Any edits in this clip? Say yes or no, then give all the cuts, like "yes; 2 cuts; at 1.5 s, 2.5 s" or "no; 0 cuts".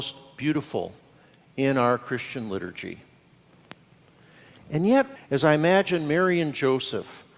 yes; 1 cut; at 5.2 s